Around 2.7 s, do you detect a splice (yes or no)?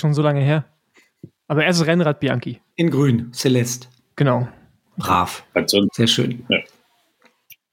yes